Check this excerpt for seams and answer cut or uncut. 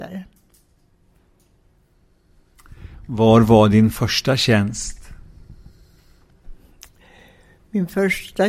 uncut